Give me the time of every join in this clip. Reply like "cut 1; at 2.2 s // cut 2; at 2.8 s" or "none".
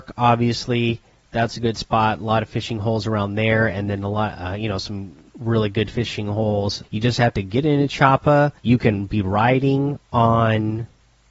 cut 1; at 6.8 s // cut 2; at 8.6 s